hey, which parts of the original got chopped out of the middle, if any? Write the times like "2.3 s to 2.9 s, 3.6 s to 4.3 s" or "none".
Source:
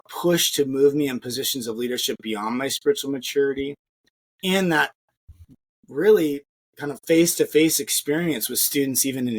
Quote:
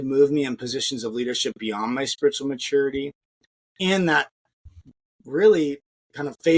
none